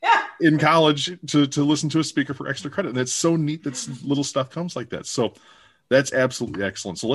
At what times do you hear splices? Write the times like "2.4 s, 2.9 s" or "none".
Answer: none